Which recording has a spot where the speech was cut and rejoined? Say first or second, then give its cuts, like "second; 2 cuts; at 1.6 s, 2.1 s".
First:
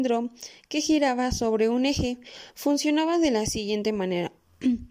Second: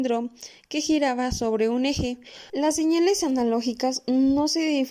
second; 1 cut; at 2.5 s